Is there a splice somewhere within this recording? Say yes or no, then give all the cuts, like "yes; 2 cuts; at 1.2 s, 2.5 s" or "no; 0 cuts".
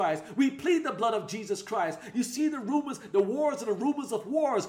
yes; 1 cut; at 2.1 s